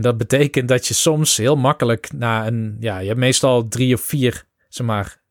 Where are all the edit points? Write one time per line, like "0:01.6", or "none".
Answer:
none